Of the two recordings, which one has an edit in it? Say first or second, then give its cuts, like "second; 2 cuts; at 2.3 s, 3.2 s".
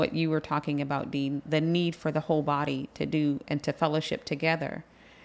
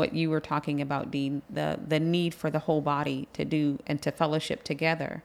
first; 1 cut; at 1.5 s